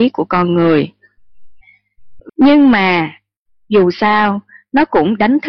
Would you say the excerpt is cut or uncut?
cut